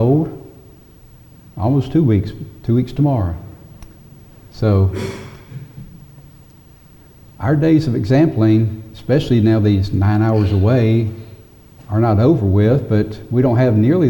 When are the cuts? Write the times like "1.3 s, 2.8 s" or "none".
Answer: none